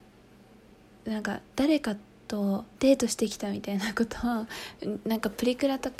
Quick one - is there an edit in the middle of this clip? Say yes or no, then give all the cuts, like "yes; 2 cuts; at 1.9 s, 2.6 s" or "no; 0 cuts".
yes; 2 cuts; at 1.5 s, 2.7 s